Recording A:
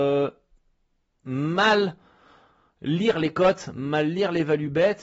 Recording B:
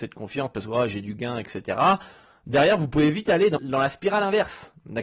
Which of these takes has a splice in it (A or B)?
B